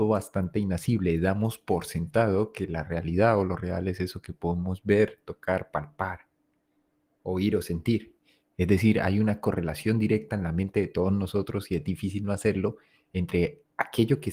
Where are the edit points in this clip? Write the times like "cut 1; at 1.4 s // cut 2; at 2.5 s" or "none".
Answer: none